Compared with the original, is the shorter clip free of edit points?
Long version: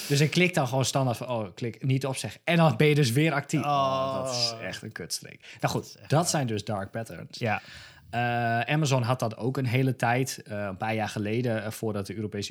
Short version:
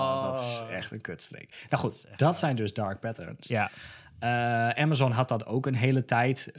yes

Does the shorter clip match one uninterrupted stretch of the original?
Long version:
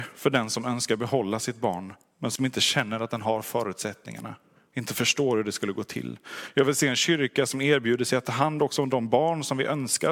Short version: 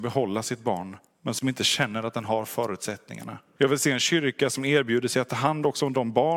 no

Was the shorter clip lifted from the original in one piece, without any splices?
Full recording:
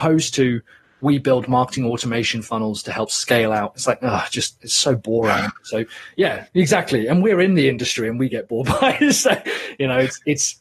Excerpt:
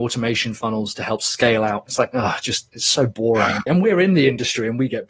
no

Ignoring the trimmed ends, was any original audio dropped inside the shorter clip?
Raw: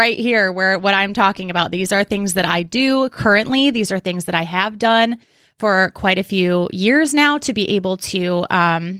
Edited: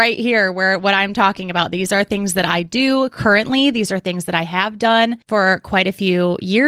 yes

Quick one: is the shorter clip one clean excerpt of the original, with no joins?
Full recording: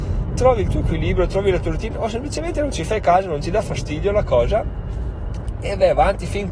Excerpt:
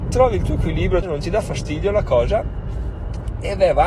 no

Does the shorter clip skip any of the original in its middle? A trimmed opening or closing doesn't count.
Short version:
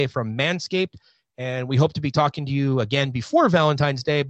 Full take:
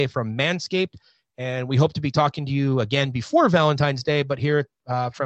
no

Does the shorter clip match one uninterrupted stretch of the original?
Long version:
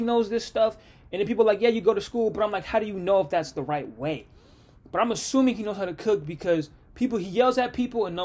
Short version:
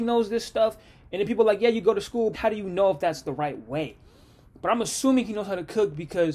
no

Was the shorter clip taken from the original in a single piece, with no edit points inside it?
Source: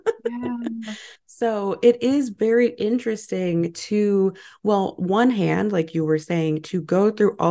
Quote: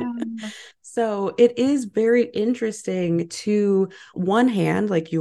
no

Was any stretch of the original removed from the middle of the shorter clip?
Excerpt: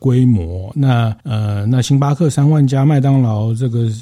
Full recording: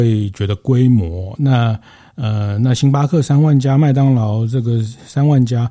yes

